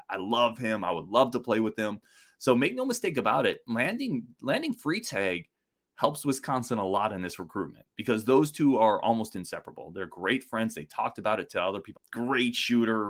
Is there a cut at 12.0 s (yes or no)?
yes